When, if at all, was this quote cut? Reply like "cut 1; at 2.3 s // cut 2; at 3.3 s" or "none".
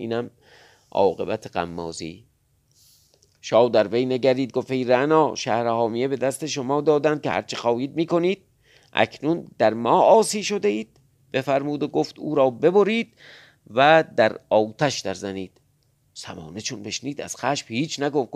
none